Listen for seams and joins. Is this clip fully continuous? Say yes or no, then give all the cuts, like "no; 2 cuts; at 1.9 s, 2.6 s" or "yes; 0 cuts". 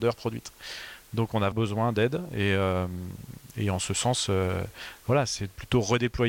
no; 1 cut; at 1.5 s